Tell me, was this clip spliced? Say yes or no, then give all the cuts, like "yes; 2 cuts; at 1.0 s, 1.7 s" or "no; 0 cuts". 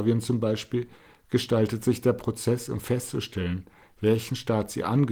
no; 0 cuts